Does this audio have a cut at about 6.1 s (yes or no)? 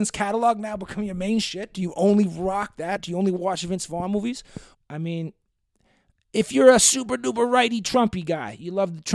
no